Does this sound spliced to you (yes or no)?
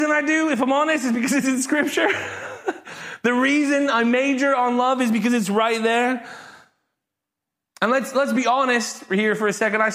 no